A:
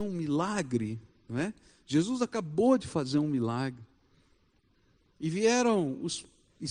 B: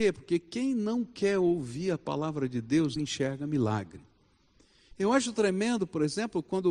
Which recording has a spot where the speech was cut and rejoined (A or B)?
B